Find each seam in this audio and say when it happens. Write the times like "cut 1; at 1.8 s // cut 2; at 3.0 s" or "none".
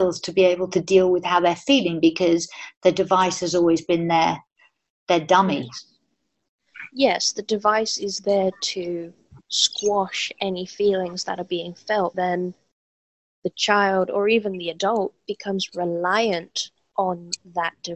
cut 1; at 12.1 s